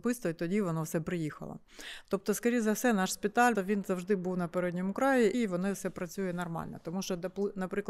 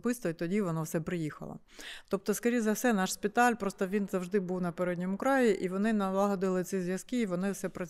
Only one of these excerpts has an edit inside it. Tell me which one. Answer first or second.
first